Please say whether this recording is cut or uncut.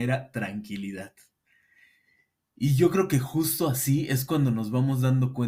uncut